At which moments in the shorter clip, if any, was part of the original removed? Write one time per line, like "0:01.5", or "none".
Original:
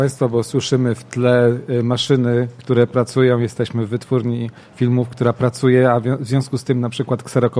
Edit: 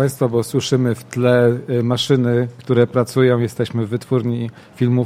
none